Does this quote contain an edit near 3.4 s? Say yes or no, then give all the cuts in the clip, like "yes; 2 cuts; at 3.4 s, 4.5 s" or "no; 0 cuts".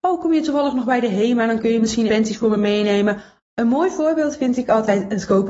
yes; 2 cuts; at 2.1 s, 3.4 s